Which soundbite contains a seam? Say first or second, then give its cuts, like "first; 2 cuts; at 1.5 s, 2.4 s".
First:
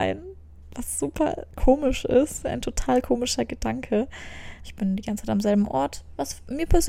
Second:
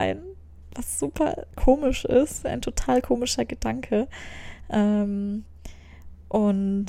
first; 1 cut; at 4.6 s